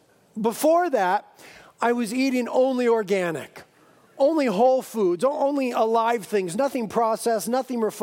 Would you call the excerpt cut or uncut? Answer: uncut